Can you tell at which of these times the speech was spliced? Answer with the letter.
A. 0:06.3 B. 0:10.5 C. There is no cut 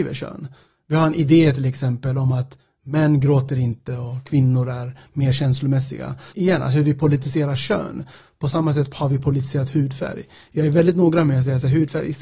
A